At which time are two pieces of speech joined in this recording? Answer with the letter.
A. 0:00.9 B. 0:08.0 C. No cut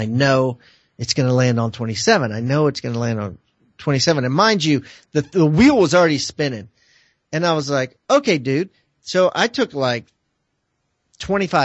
B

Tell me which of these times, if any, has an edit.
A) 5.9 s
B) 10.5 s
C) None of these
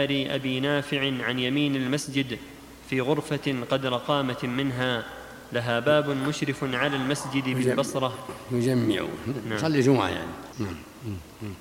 B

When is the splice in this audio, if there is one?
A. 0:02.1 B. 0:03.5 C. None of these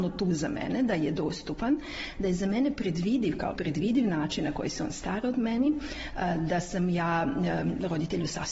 B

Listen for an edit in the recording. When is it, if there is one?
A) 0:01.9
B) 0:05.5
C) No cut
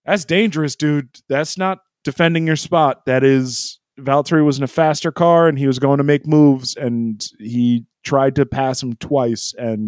A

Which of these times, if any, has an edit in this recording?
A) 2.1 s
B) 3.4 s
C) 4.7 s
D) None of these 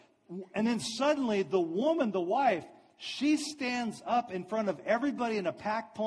D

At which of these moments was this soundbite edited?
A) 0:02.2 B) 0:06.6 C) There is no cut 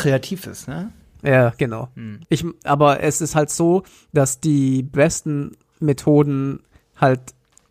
A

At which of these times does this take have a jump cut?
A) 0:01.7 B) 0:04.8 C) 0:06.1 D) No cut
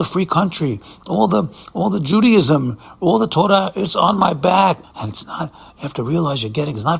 B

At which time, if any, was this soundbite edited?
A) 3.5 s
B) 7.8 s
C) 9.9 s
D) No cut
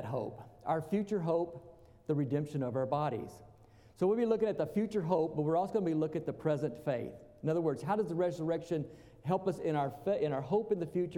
D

